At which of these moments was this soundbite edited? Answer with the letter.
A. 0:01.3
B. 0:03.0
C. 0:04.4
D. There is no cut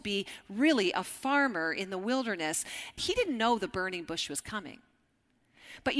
B